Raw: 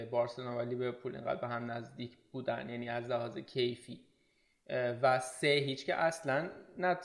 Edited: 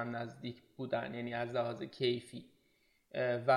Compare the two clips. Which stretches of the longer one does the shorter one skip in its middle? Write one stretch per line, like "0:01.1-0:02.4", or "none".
none